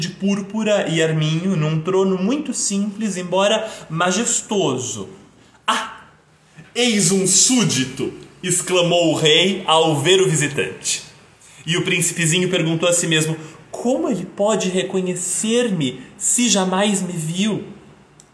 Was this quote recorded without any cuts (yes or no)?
yes